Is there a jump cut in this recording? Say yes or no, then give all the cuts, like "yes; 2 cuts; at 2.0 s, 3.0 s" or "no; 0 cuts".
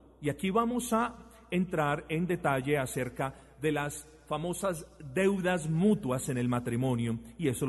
no; 0 cuts